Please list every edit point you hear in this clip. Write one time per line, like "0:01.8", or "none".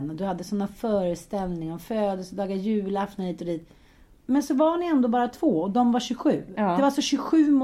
0:04.2